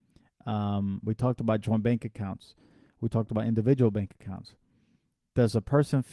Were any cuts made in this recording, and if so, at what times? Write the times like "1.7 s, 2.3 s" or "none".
none